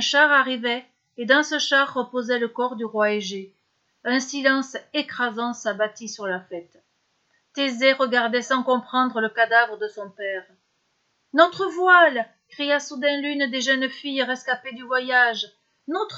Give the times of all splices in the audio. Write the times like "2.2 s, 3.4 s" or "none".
3.9 s